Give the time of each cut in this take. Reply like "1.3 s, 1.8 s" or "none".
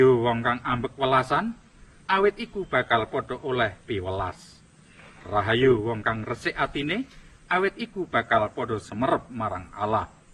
none